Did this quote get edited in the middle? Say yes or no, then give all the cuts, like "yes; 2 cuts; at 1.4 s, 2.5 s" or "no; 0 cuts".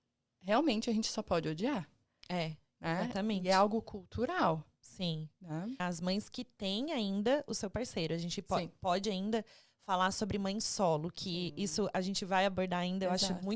yes; 1 cut; at 5.8 s